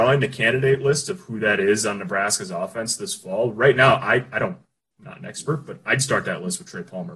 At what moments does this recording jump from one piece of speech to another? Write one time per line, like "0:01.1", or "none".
none

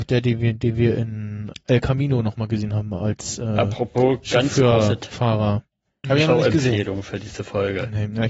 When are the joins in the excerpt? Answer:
0:01.5
0:06.0

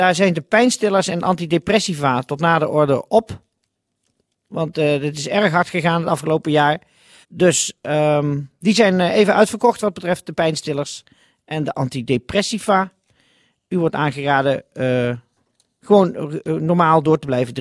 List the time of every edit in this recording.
0:07.2

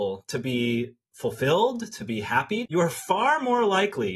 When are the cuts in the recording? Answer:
0:02.7

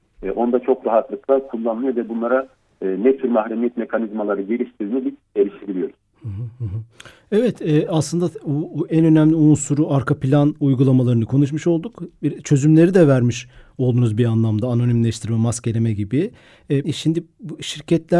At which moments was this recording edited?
0:16.8

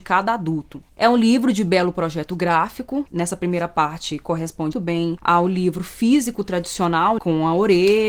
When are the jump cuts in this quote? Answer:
0:03.1
0:04.7
0:07.2

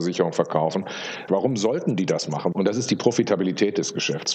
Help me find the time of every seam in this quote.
0:01.3
0:02.5

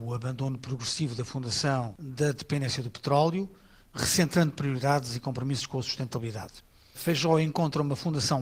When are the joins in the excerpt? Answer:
none

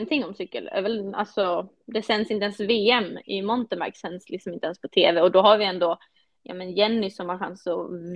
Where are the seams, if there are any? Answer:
none

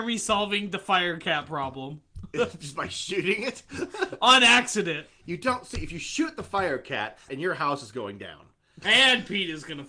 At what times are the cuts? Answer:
0:07.3
0:08.8

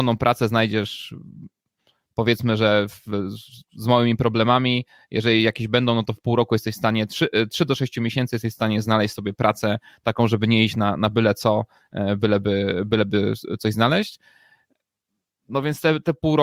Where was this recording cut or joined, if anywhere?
none

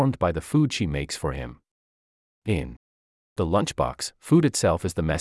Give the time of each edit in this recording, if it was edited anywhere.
none

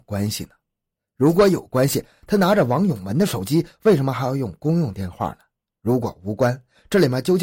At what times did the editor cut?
none

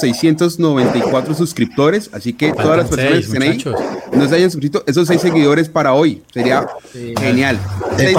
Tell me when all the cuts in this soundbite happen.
0:07.1

